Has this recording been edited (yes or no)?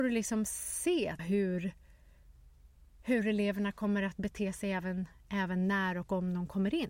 yes